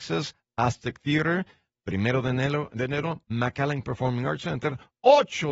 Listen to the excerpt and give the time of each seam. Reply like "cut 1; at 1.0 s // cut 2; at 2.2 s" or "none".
none